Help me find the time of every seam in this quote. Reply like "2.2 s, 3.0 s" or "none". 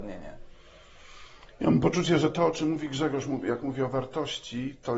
none